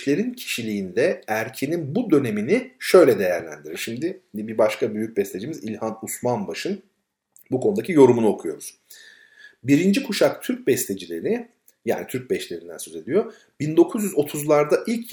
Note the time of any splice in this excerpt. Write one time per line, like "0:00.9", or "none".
none